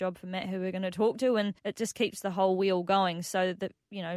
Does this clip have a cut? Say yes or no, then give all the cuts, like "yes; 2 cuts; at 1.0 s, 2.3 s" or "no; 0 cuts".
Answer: yes; 1 cut; at 1.6 s